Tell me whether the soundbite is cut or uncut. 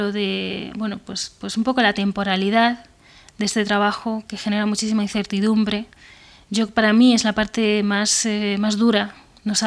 uncut